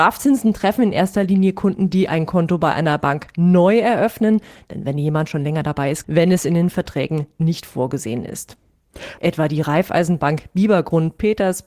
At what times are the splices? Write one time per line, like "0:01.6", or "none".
0:06.0
0:09.2

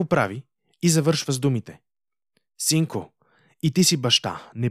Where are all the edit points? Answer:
none

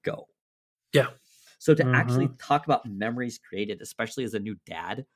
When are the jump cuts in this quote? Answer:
0:01.5

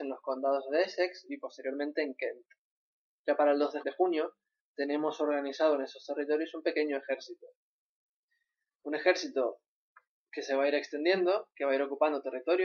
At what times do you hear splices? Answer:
0:03.8

